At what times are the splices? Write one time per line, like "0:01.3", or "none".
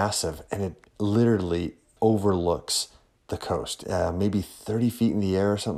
0:02.0
0:03.8